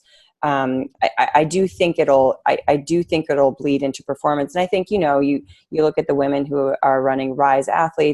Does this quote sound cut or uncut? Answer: uncut